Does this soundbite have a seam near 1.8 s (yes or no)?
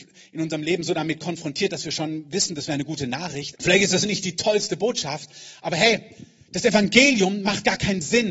no